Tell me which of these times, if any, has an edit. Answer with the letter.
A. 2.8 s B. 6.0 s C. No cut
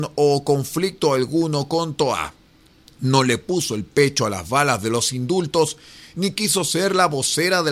A